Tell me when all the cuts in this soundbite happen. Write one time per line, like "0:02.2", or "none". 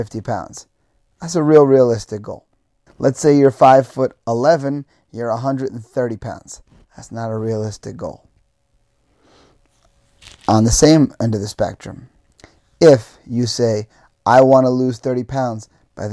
0:02.9